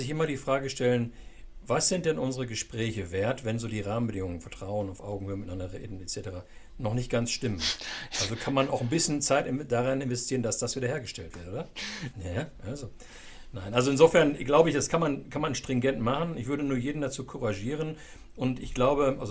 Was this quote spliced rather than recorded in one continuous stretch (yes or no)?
yes